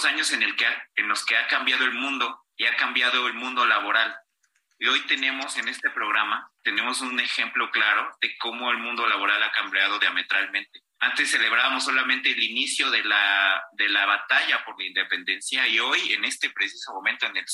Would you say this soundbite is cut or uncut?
cut